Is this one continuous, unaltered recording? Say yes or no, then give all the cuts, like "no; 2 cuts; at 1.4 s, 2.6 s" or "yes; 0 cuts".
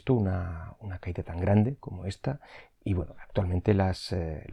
yes; 0 cuts